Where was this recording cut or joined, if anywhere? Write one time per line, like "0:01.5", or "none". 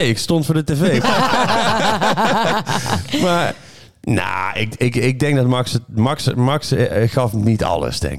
0:01.0

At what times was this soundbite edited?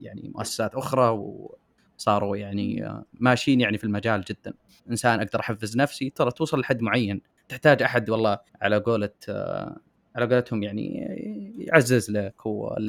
0:04.8
0:08.5

